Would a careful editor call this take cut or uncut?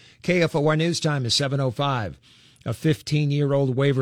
uncut